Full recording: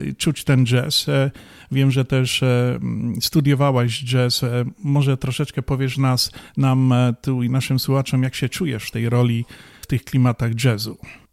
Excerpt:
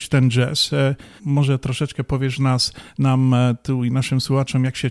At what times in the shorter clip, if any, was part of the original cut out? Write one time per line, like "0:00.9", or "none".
0:01.2